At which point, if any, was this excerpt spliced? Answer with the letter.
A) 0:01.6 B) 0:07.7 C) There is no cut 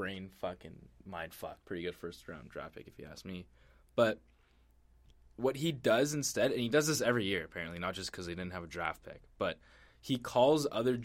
A